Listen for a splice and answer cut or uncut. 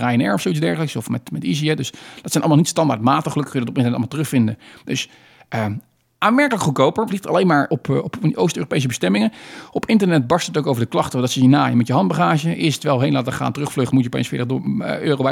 cut